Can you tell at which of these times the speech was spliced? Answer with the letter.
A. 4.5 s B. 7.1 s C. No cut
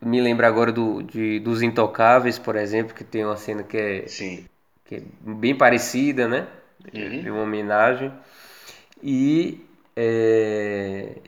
C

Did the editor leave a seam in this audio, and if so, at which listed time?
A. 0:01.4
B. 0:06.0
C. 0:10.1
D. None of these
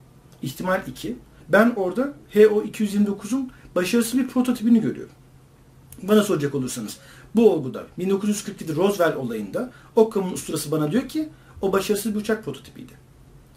A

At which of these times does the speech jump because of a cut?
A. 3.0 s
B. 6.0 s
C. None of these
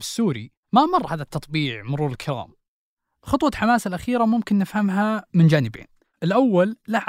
C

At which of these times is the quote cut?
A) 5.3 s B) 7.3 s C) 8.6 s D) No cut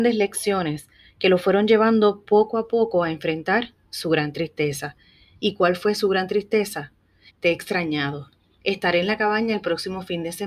B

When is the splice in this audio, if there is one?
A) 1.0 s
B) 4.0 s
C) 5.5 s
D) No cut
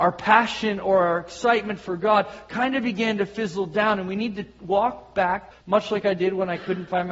C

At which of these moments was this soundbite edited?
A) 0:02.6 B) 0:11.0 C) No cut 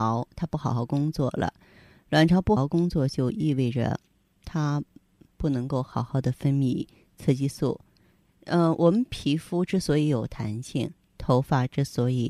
A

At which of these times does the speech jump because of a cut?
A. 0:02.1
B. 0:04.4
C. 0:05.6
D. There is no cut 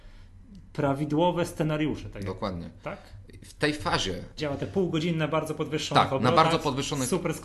B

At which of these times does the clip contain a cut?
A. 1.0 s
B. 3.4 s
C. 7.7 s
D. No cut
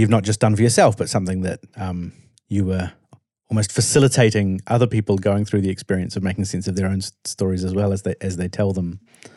D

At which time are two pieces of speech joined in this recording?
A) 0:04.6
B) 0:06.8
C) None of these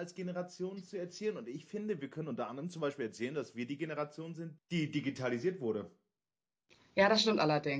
A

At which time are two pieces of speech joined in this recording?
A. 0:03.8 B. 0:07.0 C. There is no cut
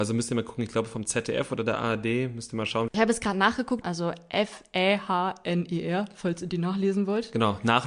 A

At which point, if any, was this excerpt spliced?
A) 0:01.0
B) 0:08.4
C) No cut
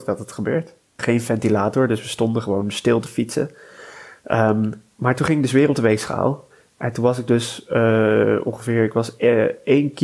A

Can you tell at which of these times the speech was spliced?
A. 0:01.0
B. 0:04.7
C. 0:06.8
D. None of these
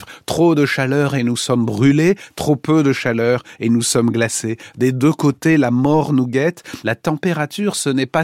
C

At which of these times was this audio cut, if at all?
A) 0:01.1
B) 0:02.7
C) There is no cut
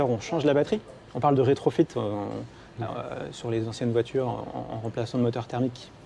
A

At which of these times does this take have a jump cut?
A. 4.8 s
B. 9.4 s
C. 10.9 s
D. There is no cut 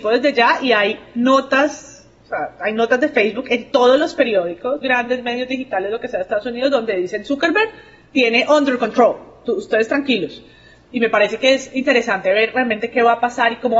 A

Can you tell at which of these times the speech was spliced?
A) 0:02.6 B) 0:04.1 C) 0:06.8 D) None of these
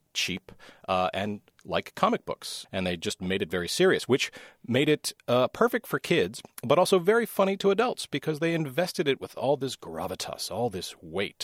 A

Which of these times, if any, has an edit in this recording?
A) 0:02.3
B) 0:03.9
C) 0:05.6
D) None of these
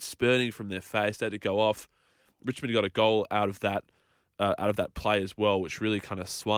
D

